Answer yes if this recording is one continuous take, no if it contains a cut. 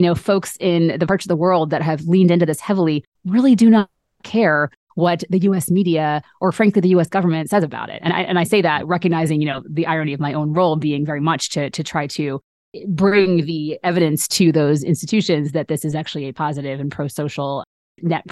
yes